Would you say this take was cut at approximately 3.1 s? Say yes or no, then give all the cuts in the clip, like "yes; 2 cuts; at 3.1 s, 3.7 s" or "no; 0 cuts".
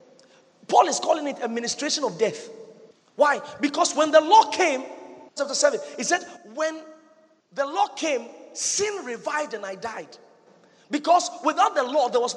no; 1 cut; at 5.4 s